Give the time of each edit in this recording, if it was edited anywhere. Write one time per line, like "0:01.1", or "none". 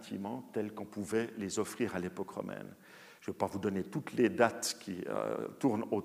none